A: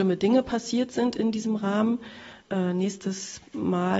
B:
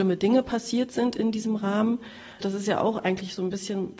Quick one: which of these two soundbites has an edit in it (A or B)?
B